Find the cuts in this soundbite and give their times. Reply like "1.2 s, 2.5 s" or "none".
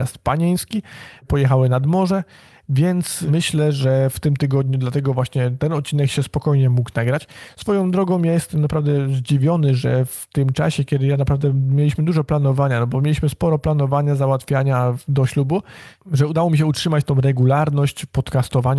none